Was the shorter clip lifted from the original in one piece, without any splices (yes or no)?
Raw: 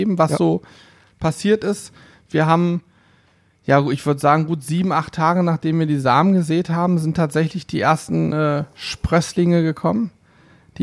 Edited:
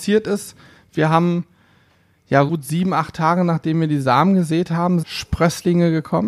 no